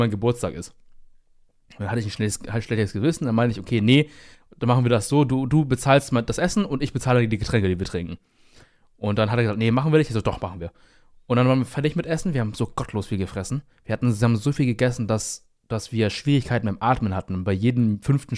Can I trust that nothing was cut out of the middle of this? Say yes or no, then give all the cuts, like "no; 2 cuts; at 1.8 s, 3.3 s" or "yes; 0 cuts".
yes; 0 cuts